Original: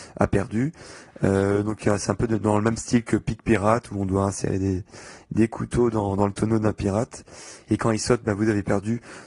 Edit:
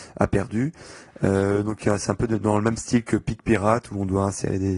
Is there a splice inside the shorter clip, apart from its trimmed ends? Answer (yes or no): no